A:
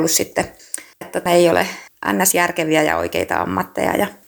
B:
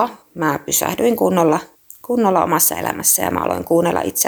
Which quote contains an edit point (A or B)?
A